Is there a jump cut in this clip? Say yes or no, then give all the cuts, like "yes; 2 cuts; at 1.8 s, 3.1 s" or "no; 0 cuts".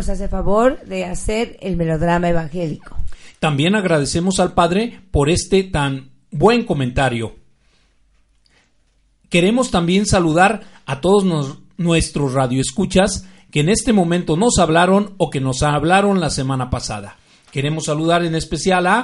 no; 0 cuts